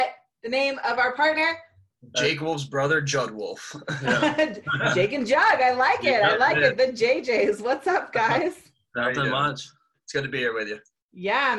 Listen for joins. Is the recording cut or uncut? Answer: uncut